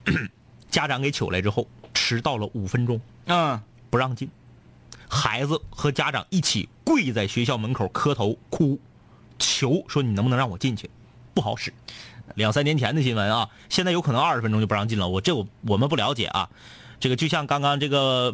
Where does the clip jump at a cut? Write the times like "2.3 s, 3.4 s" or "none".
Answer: 12.3 s